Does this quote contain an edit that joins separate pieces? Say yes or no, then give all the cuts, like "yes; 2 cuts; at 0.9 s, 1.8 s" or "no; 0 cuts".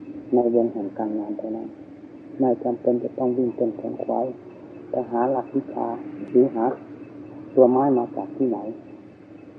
no; 0 cuts